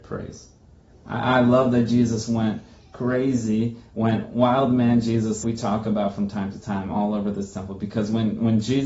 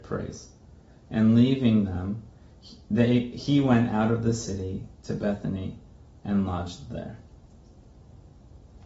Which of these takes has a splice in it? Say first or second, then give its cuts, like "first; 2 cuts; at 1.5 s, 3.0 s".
first; 2 cuts; at 0.9 s, 5.4 s